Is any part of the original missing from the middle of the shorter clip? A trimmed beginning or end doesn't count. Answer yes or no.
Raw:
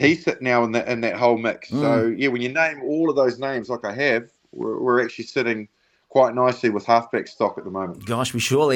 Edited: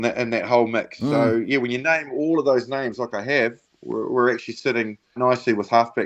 yes